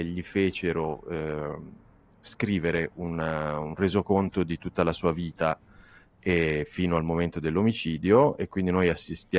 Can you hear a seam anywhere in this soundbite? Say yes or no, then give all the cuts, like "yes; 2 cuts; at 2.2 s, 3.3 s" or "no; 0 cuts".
no; 0 cuts